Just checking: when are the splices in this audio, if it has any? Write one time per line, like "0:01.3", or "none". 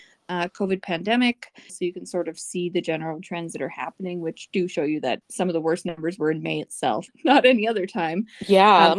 0:01.7
0:05.2
0:07.1